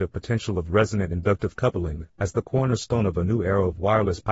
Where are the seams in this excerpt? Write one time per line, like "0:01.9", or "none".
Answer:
0:02.1